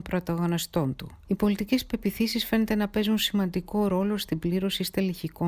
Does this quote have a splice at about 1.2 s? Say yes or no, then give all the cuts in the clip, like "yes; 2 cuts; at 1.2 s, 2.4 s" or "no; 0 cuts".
yes; 1 cut; at 1.2 s